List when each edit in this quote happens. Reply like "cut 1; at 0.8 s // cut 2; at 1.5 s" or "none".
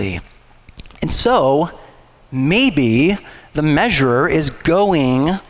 none